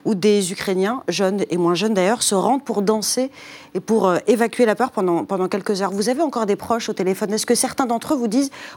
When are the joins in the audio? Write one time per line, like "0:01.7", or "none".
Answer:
none